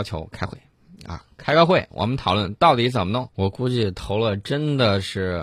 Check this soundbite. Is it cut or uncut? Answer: cut